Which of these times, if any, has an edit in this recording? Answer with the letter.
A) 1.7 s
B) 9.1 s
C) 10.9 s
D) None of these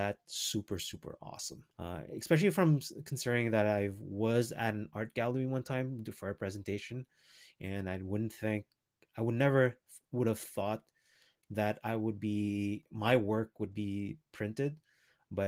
A